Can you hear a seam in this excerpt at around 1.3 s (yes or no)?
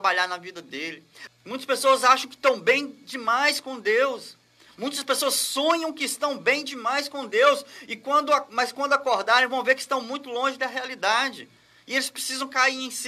yes